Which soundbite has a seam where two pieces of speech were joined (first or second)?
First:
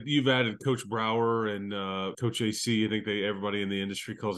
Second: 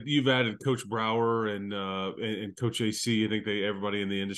first